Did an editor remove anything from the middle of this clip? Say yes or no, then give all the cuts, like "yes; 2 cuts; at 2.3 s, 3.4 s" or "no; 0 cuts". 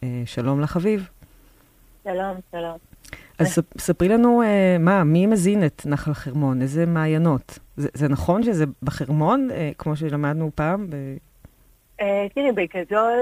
no; 0 cuts